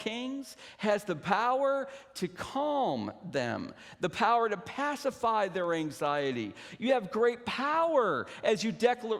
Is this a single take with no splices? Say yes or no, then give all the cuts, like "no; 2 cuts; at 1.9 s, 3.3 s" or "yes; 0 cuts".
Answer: yes; 0 cuts